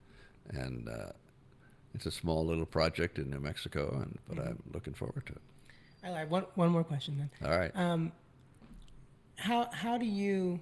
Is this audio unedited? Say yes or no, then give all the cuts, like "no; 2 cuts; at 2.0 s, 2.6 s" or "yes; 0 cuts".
yes; 0 cuts